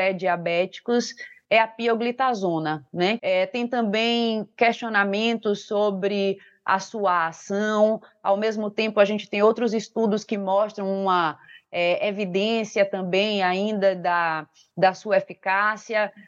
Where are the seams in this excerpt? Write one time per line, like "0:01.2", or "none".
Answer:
0:03.2